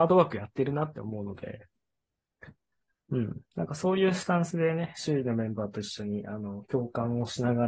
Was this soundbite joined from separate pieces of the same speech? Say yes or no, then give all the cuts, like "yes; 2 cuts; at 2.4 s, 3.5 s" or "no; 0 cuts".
no; 0 cuts